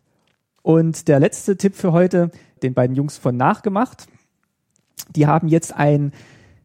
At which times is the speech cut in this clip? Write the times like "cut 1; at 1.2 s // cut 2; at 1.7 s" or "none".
cut 1; at 2.6 s